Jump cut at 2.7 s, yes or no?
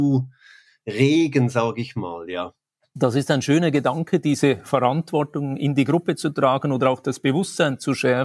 no